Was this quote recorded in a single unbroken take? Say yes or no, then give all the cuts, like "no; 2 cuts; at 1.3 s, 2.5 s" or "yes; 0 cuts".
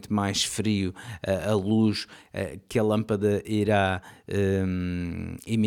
yes; 0 cuts